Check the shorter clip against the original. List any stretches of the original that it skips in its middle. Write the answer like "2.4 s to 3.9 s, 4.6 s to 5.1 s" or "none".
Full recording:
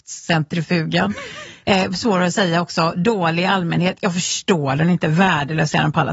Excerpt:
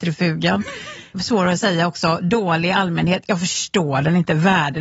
1.6 s to 1.9 s